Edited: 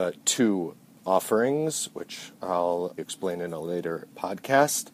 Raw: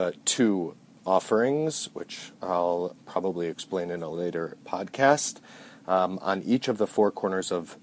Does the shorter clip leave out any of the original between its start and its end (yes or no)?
yes